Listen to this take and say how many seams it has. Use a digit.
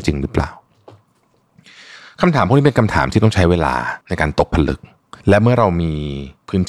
2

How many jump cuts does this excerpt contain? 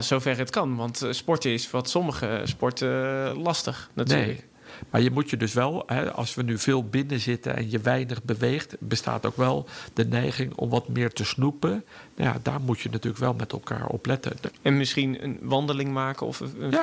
1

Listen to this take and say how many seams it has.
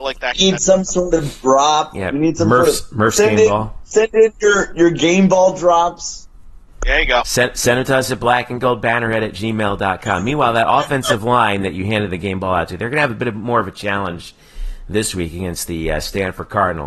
0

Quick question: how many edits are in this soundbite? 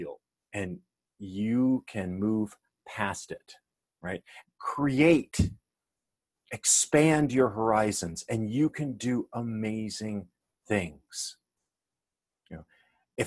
1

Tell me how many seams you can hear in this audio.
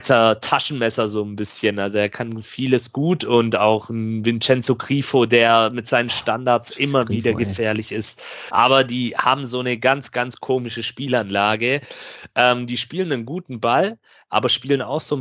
1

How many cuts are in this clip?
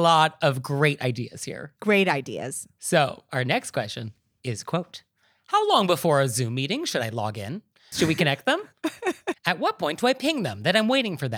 2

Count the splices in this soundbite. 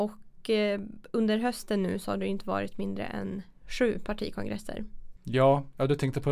1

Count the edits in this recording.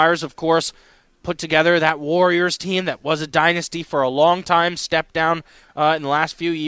0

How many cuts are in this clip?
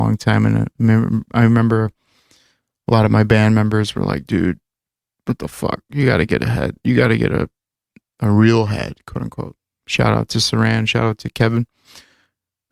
0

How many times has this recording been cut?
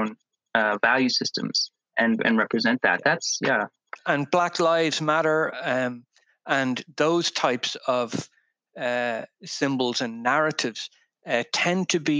0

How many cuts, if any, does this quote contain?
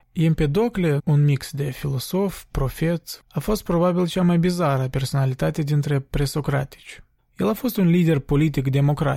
3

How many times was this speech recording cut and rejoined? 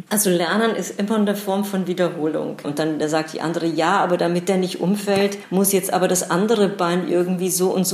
1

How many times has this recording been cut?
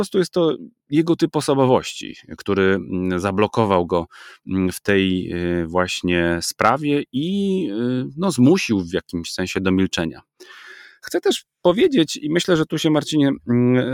0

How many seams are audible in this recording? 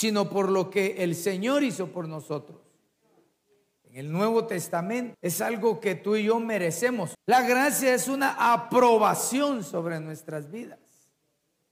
3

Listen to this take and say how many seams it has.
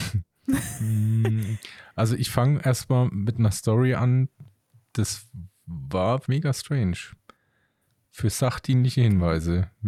1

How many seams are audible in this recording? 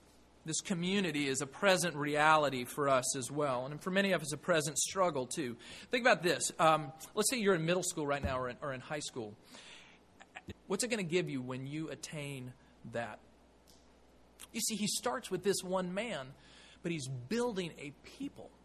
2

